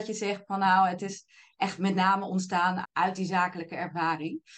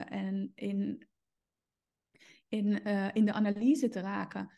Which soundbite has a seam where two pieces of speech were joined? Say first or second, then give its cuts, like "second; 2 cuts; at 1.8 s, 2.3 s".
first; 1 cut; at 2.8 s